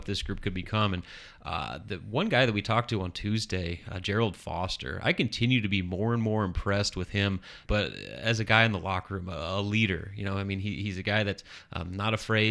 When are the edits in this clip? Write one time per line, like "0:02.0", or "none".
0:07.7